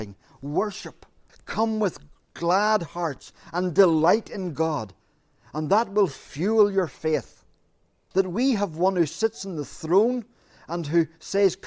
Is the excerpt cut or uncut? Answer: cut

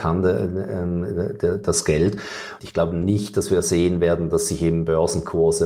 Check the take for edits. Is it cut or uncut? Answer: cut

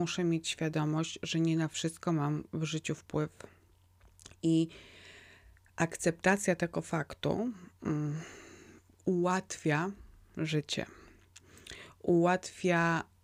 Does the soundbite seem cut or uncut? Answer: uncut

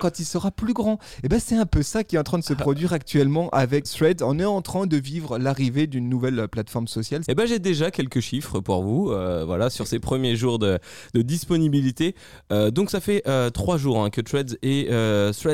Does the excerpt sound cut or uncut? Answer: cut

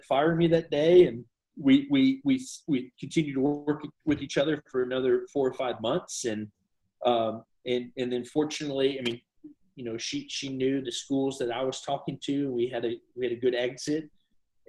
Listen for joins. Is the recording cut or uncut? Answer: uncut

